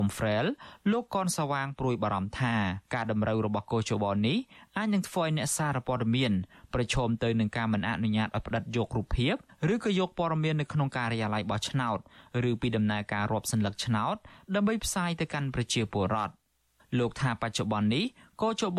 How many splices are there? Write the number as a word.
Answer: one